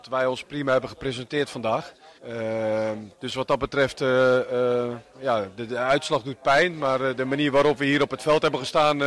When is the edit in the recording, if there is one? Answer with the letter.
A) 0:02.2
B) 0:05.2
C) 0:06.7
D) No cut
A